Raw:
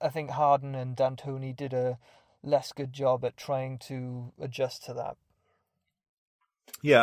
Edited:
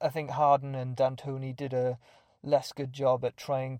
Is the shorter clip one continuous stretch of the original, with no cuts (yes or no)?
yes